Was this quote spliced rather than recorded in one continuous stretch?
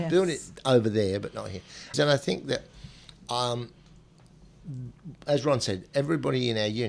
yes; 1 cut; at 1.9 s

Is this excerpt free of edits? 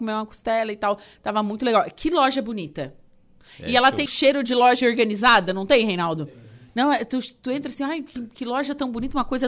no; 1 cut; at 4.1 s

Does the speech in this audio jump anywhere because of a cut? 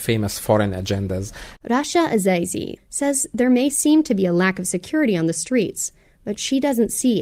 yes; 2 cuts; at 1.6 s, 2.8 s

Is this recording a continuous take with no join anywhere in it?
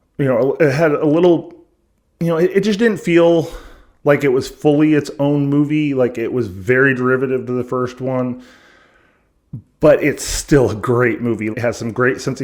no; 1 cut; at 11.5 s

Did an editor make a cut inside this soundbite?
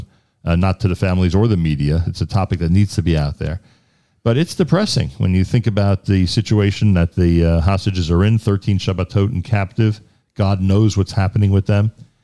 no; 0 cuts

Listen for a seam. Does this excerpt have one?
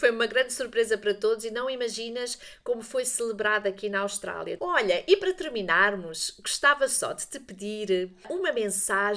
yes; 1 cut; at 4.6 s

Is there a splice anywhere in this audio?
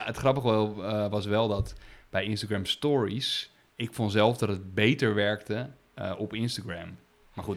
yes; 1 cut; at 3.7 s

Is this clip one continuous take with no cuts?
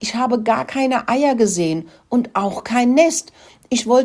yes; 0 cuts

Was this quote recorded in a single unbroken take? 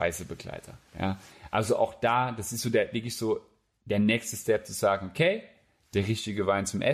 yes; 0 cuts

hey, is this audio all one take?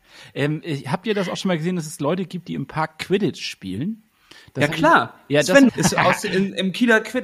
no; 1 cut; at 5.7 s

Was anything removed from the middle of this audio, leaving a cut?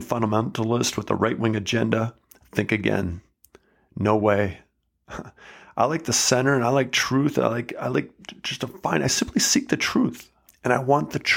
yes; 1 cut; at 10.5 s

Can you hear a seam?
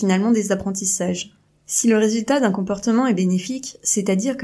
yes; 1 cut; at 1.5 s

